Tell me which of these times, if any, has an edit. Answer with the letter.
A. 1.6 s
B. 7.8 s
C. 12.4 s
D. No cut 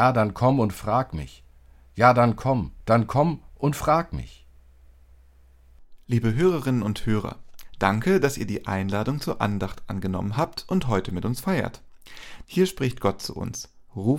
C